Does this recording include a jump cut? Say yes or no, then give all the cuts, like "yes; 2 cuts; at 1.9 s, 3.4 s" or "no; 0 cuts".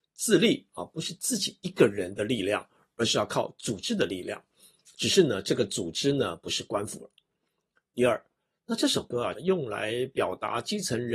yes; 1 cut; at 9.4 s